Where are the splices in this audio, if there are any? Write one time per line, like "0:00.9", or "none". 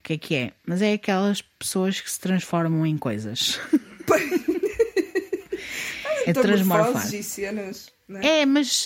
0:06.3